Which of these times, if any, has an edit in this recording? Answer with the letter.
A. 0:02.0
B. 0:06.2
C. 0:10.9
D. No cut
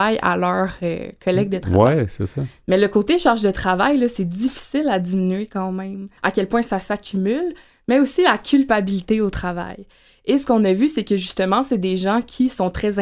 B